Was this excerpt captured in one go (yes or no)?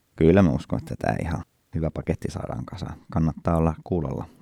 yes